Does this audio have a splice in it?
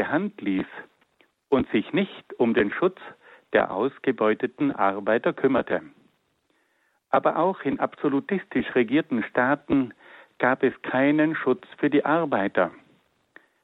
no; 0 cuts

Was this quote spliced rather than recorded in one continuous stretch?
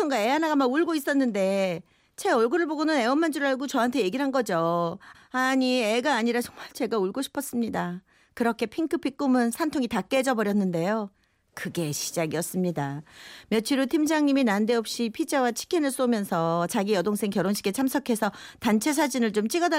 yes; 1 cut; at 5.1 s

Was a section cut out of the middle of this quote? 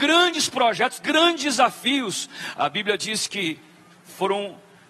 yes; 2 cuts; at 2.5 s, 3.9 s

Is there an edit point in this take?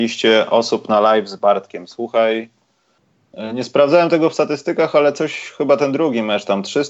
no; 0 cuts

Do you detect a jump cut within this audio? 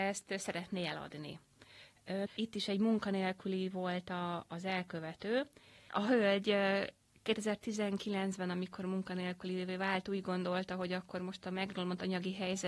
yes; 1 cut; at 2.3 s

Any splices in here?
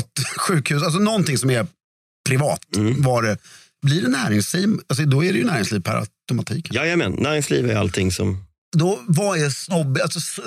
no; 0 cuts

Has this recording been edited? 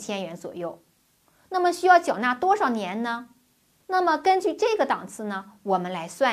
yes; 1 cut; at 3.8 s

